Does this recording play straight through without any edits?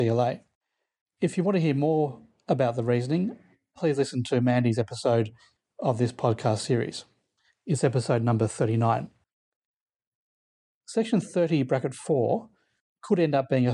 no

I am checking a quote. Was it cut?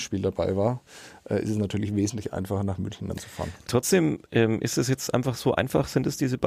yes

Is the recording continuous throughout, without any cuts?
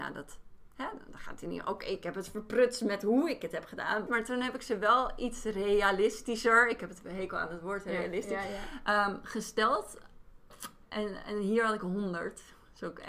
no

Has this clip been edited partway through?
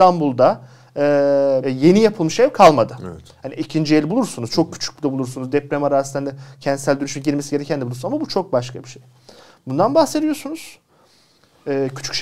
yes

